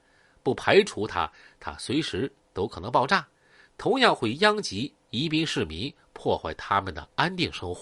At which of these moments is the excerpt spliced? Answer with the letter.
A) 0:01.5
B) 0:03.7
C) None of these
C